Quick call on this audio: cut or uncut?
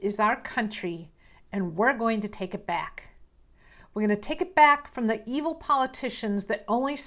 uncut